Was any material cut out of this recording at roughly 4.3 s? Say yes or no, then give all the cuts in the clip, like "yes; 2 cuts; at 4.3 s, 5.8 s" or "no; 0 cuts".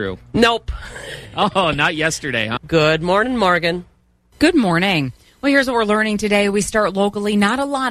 no; 1 cut; at 2.6 s